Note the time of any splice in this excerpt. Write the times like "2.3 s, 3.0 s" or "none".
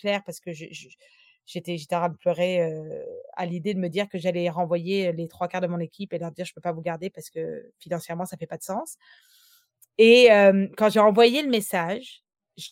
none